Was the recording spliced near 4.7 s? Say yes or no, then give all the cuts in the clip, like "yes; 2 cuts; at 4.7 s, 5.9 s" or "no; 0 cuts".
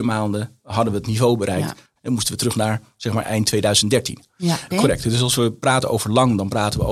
yes; 2 cuts; at 2.0 s, 4.7 s